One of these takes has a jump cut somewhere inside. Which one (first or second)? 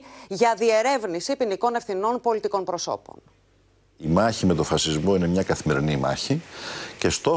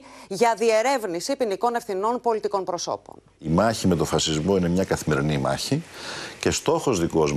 second